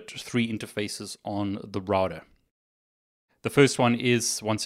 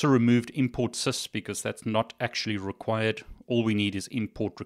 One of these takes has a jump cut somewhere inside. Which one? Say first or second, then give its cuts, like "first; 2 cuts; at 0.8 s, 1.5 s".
first; 1 cut; at 3.3 s